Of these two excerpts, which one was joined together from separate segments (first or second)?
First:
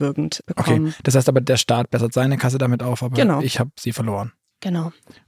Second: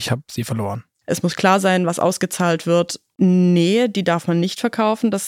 second